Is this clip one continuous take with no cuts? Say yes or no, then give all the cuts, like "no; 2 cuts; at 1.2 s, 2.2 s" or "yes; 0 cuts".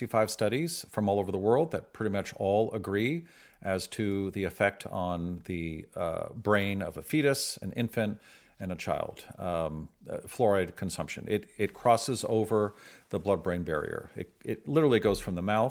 yes; 0 cuts